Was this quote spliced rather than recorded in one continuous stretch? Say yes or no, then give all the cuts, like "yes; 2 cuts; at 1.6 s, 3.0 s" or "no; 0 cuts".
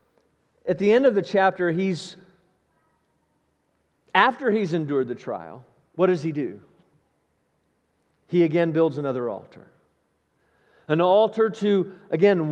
no; 0 cuts